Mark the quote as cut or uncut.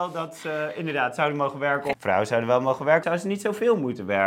cut